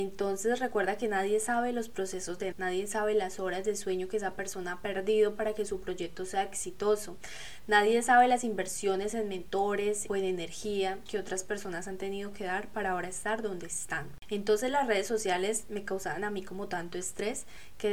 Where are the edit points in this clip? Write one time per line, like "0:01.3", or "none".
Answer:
0:02.5
0:10.1